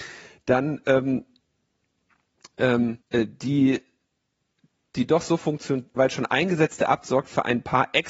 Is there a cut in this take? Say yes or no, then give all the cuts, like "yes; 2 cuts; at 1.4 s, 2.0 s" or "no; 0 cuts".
yes; 2 cuts; at 3.0 s, 6.0 s